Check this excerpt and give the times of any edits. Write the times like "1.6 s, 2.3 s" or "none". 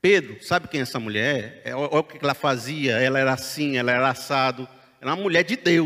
none